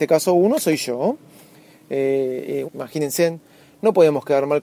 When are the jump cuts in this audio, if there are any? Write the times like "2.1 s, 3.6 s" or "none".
2.6 s